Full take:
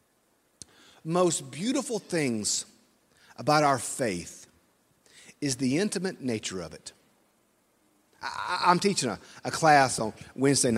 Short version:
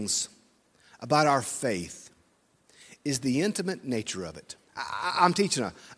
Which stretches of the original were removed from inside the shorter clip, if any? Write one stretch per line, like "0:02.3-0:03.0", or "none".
0:07.0-0:08.1

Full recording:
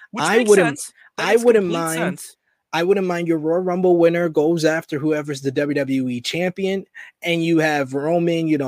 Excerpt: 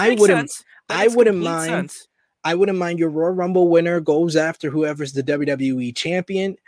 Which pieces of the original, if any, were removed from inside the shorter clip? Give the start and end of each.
none

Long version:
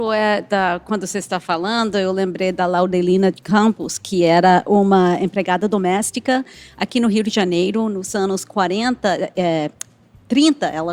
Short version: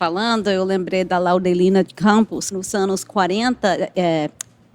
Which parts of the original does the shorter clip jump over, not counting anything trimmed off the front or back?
0:04.0-0:07.9

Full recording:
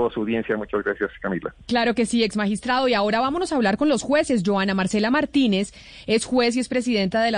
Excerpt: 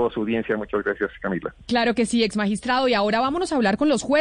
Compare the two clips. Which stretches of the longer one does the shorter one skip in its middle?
none

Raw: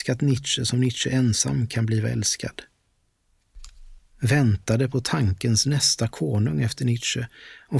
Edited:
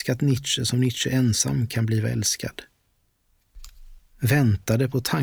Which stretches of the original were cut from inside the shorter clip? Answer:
none

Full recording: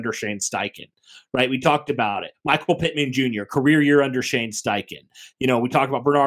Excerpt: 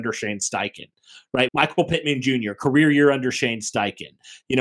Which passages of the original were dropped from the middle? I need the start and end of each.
0:01.5-0:02.4

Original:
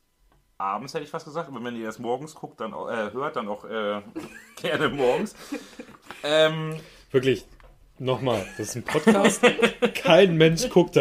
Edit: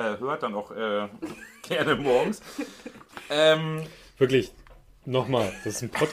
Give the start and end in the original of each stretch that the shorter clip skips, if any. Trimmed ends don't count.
none

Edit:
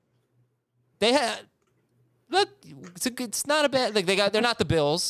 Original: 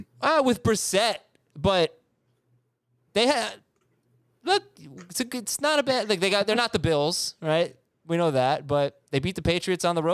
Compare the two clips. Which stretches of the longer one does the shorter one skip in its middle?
none

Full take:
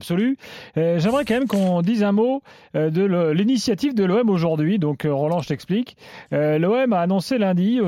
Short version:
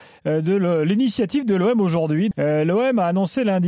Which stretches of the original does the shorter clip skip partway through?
0:04.8-0:06.3

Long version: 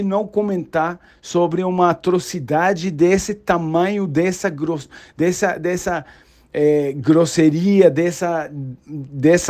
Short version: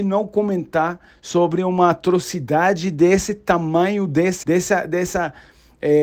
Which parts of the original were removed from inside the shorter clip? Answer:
0:04.4-0:05.1

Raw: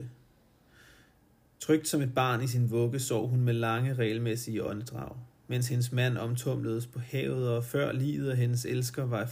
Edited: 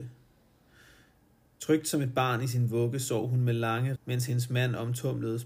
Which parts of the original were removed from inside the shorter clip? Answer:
0:04.0-0:05.4

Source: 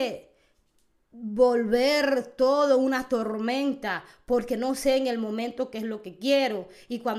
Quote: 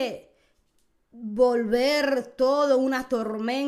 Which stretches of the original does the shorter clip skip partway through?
none

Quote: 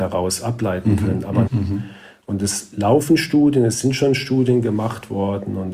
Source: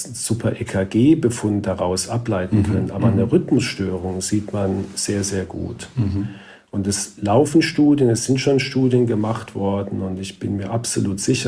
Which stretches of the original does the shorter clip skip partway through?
0:03.1-0:05.9

